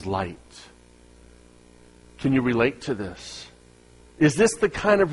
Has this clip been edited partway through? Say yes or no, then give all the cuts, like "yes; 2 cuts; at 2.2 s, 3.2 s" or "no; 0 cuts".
yes; 1 cut; at 4.1 s